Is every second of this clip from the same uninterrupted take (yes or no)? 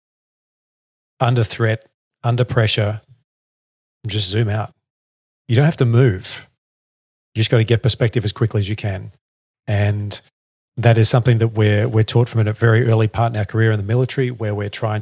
yes